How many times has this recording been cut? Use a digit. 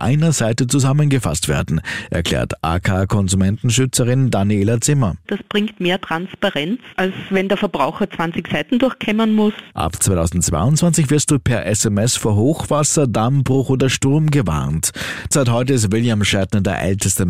2